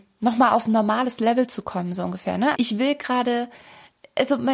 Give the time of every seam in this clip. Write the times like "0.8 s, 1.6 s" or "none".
2.5 s